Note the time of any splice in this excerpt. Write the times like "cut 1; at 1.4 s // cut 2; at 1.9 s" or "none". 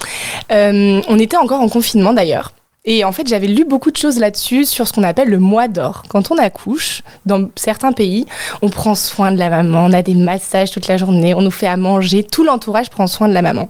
none